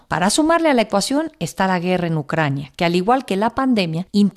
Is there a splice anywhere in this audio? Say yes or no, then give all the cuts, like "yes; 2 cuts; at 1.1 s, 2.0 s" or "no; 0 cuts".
no; 0 cuts